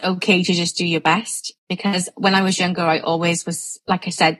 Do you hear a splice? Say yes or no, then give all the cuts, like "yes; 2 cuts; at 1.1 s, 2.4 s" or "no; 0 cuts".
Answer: yes; 1 cut; at 1.6 s